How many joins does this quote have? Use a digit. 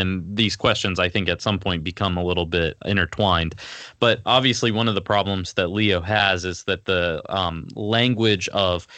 0